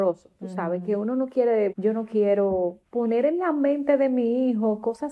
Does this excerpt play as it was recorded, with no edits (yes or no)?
no